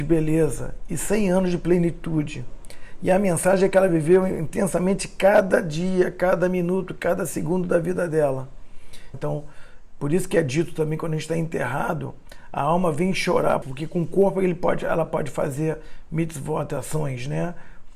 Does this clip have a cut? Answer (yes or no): yes